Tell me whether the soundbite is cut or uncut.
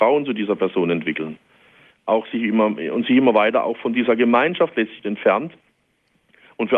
cut